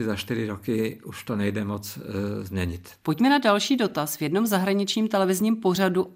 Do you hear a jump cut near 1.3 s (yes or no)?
no